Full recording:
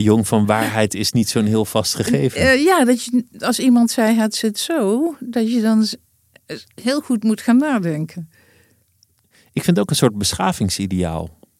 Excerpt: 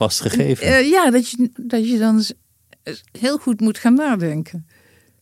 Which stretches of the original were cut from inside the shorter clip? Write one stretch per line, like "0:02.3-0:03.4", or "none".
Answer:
0:03.3-0:05.2